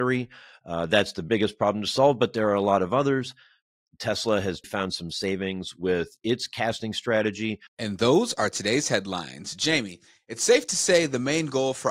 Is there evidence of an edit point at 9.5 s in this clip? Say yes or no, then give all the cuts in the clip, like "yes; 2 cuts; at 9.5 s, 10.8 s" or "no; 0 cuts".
no; 2 cuts; at 4.6 s, 7.7 s